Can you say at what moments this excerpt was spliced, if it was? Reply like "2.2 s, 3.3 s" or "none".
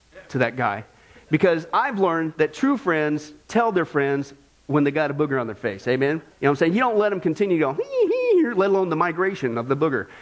6.3 s, 8.1 s